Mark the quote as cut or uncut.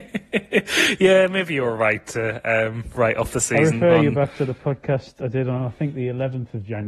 uncut